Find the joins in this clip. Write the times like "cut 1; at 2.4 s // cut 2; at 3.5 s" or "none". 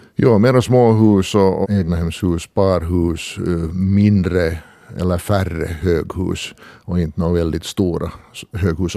cut 1; at 1.6 s